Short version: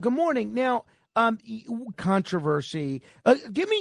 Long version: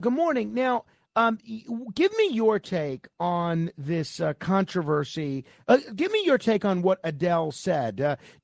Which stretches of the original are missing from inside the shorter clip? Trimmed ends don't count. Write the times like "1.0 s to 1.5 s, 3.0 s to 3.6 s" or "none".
1.9 s to 4.4 s